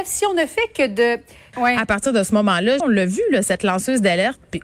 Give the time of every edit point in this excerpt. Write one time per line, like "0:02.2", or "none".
0:01.5
0:02.8

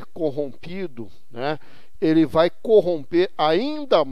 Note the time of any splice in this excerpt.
0:01.9

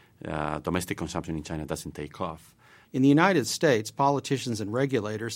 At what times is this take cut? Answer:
0:02.8

